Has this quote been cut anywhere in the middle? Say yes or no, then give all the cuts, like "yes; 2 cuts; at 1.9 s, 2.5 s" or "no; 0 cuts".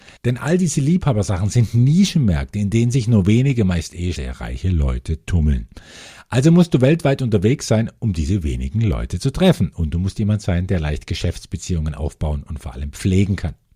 yes; 1 cut; at 4.1 s